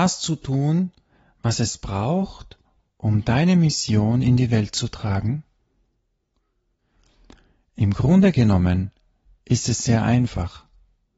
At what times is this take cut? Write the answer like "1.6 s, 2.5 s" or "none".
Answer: none